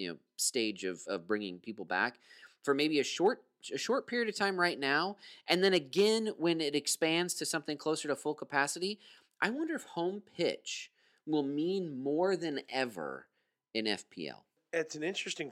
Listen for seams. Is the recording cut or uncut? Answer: uncut